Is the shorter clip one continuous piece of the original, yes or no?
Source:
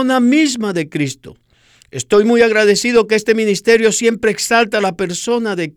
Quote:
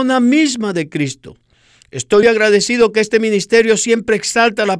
no